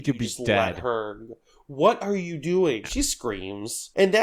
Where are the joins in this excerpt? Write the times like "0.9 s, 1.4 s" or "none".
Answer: 2.8 s